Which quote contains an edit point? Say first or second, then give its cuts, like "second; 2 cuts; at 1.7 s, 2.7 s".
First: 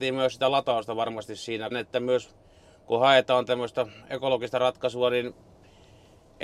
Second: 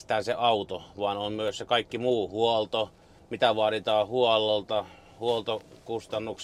first; 1 cut; at 1.7 s